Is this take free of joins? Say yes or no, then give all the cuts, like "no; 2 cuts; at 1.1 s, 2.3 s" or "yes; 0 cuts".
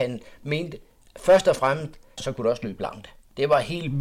no; 1 cut; at 2.2 s